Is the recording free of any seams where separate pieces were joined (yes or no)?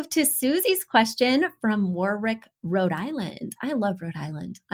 yes